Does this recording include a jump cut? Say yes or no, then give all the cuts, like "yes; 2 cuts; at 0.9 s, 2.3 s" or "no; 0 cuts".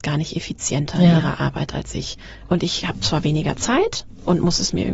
no; 0 cuts